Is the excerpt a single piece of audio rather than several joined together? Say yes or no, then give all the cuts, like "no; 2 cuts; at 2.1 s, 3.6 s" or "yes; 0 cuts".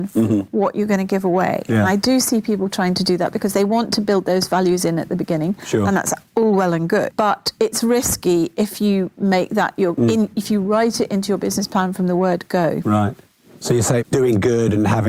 no; 2 cuts; at 7.1 s, 14.0 s